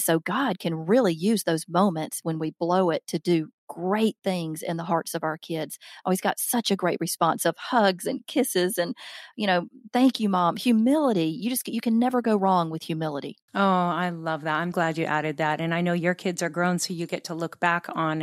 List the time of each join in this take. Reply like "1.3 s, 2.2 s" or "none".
13.5 s, 14.7 s